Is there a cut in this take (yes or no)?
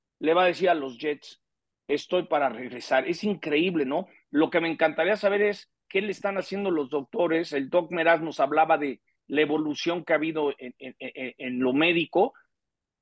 no